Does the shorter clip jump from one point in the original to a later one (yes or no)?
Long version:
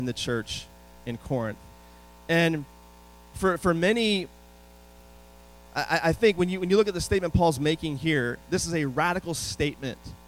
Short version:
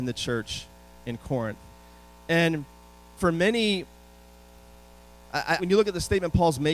yes